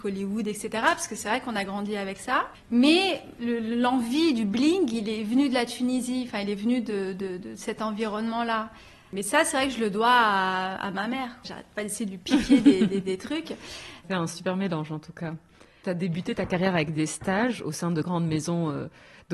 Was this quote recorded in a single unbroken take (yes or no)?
no